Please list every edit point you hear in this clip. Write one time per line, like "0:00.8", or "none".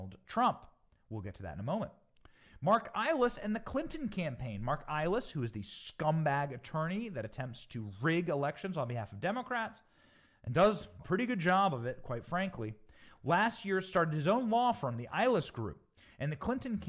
0:11.0

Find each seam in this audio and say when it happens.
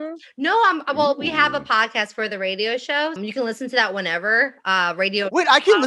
0:03.2

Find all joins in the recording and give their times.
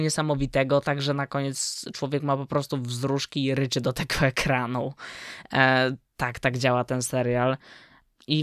none

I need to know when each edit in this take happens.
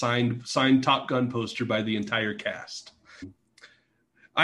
0:03.2

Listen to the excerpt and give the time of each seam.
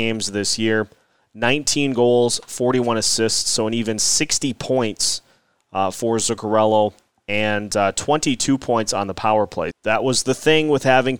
0:09.7

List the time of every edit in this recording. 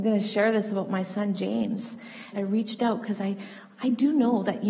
0:02.3

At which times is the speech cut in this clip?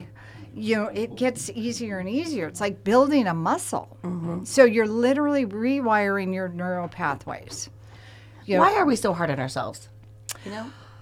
none

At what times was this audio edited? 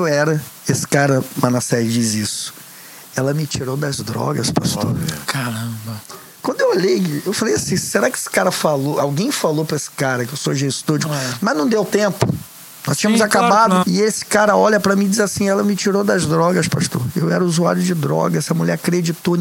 0:11.1
0:13.8

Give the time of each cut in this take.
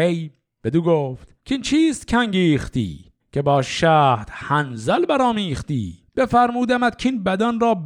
0:01.4
0:03.2
0:06.1

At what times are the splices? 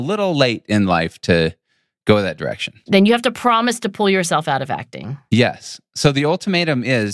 0:02.9

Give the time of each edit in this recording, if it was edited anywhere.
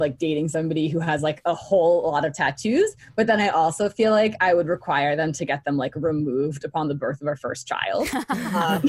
none

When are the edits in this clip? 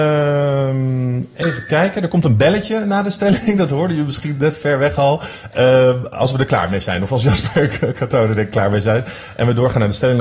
none

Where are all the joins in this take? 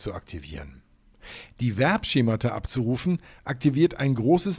none

